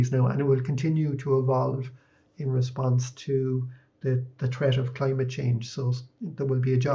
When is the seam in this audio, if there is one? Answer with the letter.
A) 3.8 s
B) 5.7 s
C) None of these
C